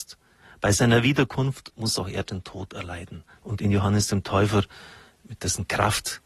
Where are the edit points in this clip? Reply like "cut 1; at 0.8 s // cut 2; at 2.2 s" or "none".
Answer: cut 1; at 3.4 s